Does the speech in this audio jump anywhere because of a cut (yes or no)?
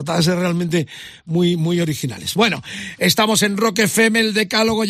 no